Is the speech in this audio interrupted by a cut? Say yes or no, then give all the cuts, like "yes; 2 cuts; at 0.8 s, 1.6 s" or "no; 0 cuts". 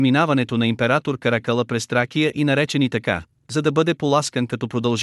no; 0 cuts